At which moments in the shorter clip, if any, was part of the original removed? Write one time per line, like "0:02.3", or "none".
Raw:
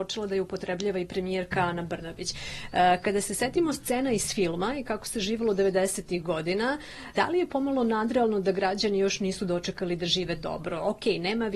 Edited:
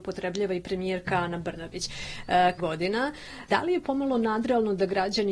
0:02.6